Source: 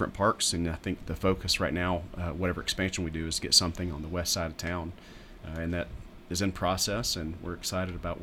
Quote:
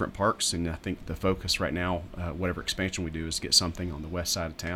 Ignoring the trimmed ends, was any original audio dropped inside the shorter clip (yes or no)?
no